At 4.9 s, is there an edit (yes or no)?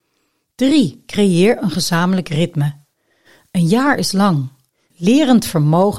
yes